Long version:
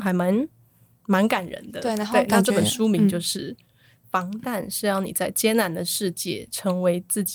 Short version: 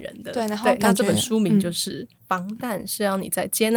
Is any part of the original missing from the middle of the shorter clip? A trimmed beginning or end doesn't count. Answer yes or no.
yes